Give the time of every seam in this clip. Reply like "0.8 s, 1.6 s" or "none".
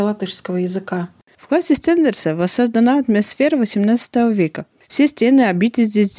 none